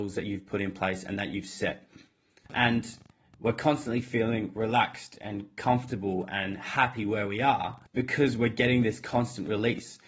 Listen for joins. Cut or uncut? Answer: cut